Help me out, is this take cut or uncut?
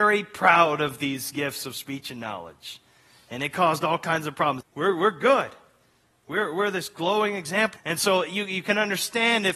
cut